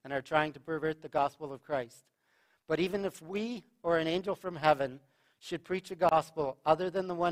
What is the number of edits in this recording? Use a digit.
0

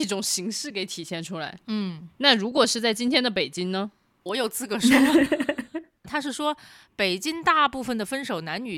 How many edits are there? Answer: 2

